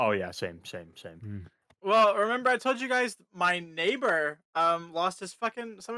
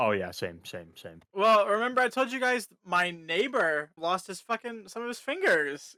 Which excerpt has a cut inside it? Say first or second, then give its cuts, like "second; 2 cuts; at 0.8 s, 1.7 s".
second; 2 cuts; at 1.2 s, 4.0 s